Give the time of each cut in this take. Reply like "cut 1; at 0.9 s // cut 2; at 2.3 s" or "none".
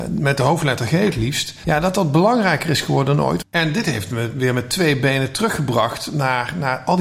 cut 1; at 1.6 s // cut 2; at 3.4 s